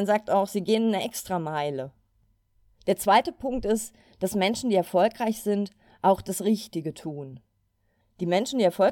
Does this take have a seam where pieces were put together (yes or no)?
yes